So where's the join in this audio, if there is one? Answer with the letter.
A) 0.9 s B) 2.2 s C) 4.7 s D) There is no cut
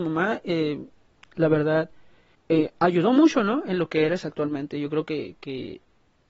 D